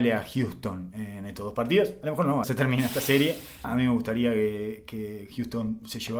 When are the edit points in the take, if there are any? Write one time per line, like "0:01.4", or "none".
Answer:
0:02.4
0:03.6